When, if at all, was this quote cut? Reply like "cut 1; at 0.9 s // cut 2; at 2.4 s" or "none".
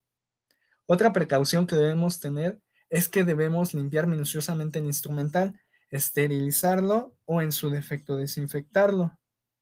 none